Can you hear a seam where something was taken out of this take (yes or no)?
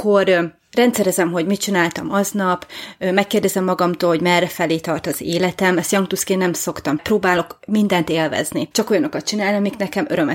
yes